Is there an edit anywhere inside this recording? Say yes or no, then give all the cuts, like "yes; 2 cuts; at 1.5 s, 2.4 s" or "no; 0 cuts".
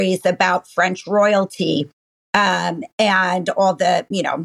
no; 0 cuts